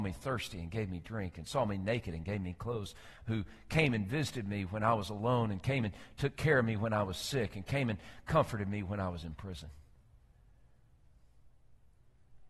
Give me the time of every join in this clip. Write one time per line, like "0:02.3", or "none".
none

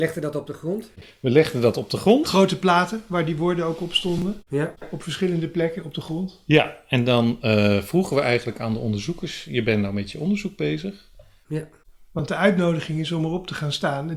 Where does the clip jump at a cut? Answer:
0:11.4

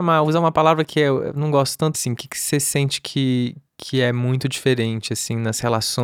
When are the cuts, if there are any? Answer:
0:01.9

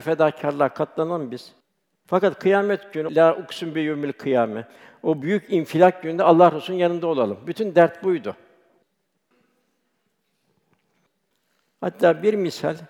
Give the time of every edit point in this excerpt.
0:03.1

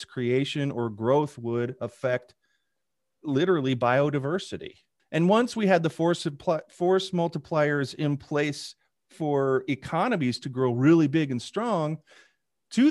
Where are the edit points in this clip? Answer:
0:05.0

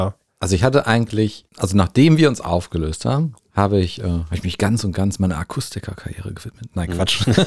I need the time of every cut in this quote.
0:01.5
0:03.4

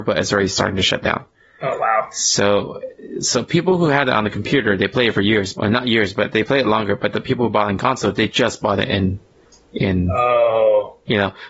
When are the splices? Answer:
0:05.5

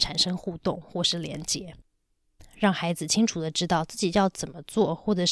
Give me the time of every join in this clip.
0:02.4

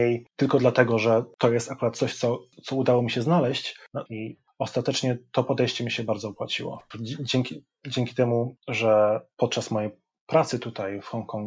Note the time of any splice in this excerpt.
0:04.1
0:06.9

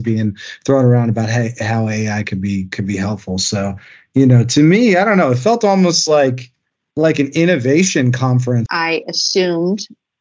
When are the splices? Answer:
0:08.7

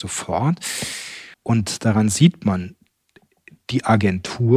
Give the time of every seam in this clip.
0:01.3

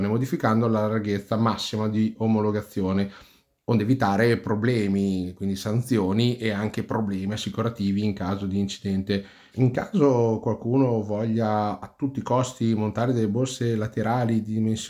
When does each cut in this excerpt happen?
0:09.5

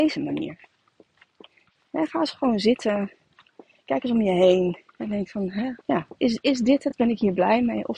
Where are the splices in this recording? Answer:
0:05.8

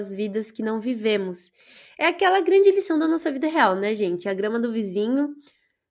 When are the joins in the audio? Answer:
none

